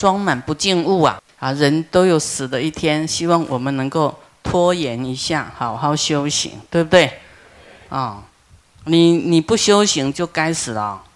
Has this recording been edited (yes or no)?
yes